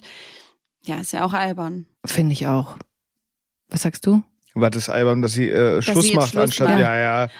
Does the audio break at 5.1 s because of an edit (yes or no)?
no